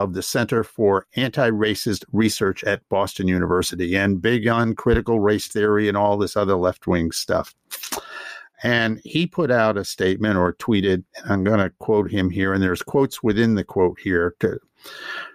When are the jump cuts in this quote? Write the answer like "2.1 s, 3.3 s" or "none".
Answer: 11.1 s